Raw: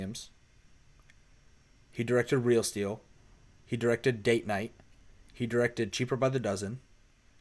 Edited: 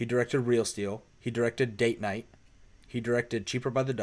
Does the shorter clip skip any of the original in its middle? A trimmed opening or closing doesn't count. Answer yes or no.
yes